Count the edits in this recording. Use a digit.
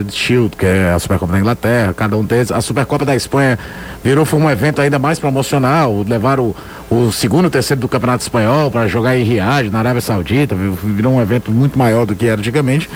0